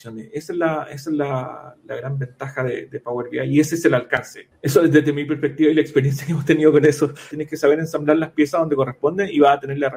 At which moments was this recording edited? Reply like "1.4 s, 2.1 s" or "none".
4.5 s, 7.3 s